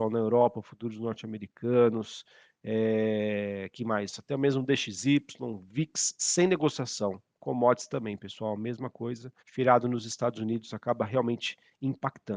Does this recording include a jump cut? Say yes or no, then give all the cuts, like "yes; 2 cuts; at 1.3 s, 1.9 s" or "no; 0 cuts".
yes; 1 cut; at 9.4 s